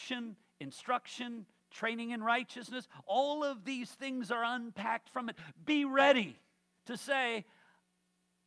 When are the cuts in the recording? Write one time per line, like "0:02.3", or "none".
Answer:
none